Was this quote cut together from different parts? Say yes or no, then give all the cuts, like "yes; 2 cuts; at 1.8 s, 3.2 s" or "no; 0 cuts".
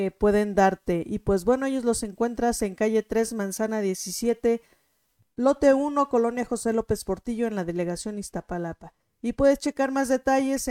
no; 0 cuts